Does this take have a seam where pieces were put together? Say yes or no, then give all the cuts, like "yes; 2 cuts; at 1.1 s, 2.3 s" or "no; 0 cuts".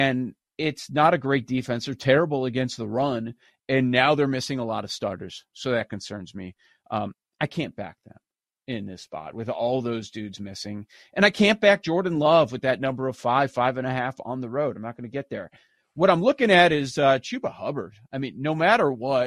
no; 0 cuts